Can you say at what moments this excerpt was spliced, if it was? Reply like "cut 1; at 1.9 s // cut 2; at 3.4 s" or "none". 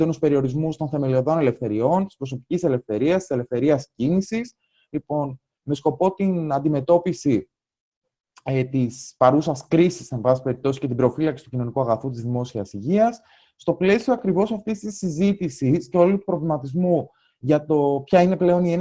none